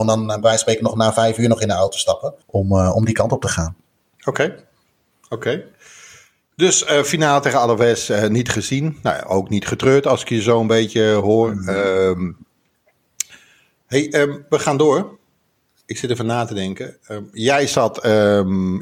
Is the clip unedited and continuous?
no; 1 cut; at 2.4 s

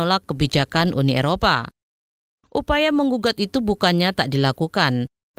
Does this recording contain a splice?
no; 0 cuts

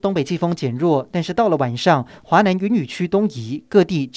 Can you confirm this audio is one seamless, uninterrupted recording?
yes; 0 cuts

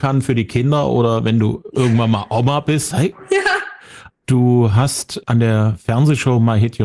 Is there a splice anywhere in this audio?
yes; 2 cuts; at 2.9 s, 4.1 s

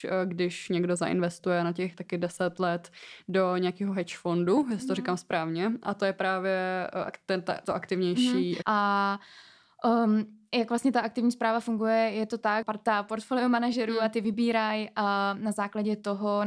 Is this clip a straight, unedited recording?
no; 2 cuts; at 8.6 s, 12.6 s

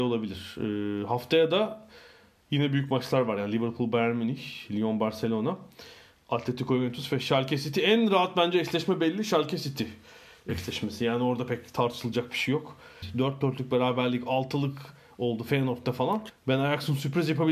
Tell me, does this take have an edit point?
yes; 2 cuts; at 13.0 s, 16.3 s

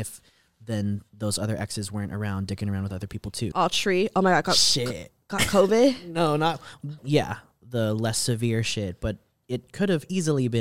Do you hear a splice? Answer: yes; 2 cuts; at 3.5 s, 7.0 s

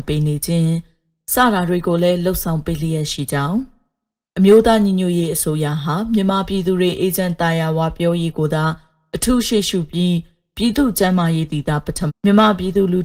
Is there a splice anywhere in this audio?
yes; 1 cut; at 12.1 s

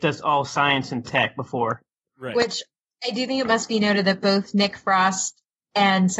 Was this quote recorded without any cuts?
yes; 0 cuts

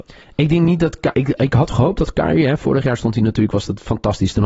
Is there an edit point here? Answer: yes; 1 cut; at 1.1 s

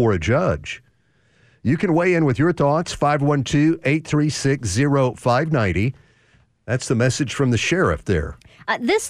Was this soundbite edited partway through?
yes; 1 cut; at 6.5 s

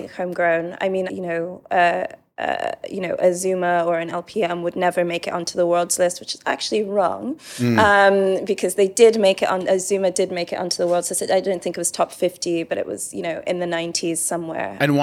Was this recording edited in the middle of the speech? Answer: yes; 1 cut; at 1.1 s

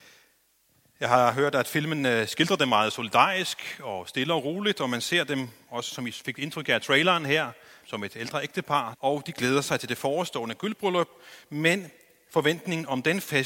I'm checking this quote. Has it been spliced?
yes; 2 cuts; at 7.8 s, 8.9 s

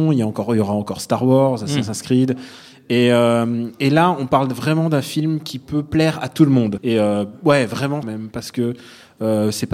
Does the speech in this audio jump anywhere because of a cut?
yes; 2 cuts; at 6.8 s, 8.0 s

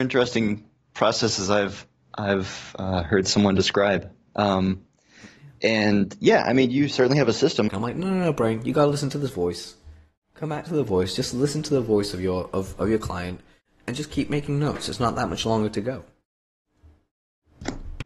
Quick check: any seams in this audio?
yes; 1 cut; at 7.7 s

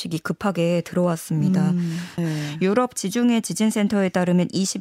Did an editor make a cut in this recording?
yes; 1 cut; at 2.2 s

